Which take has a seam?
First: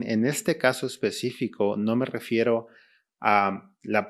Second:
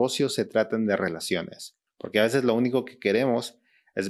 second; 1 cut; at 1.9 s

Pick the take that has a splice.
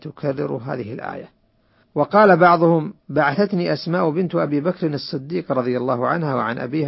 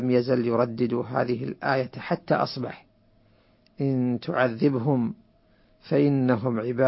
first; 2 cuts; at 1.8 s, 3.0 s

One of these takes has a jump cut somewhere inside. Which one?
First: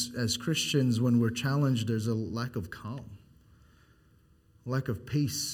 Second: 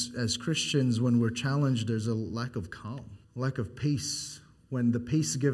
second; 1 cut; at 3.2 s

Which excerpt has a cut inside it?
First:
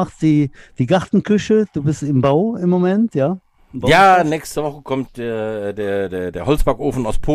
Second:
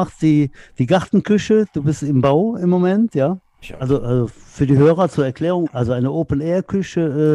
second; 2 cuts; at 3.6 s, 5.7 s

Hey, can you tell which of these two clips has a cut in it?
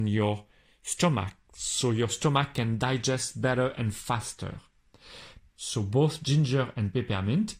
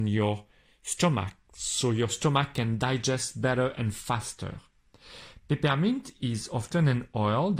first; 1 cut; at 5.5 s

